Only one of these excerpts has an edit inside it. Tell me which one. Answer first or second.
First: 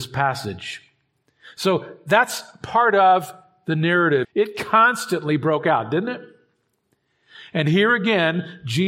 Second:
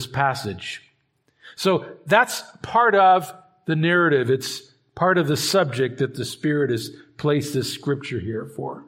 first